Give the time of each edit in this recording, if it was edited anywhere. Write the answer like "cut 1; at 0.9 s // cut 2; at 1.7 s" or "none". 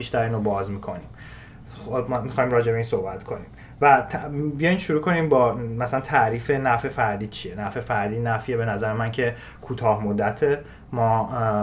none